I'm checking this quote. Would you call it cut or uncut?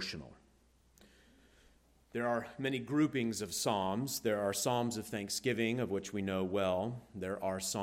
uncut